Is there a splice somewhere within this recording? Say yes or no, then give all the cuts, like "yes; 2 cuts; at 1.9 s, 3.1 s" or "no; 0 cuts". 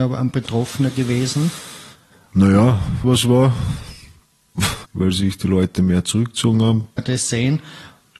yes; 3 cuts; at 3.0 s, 4.8 s, 7.0 s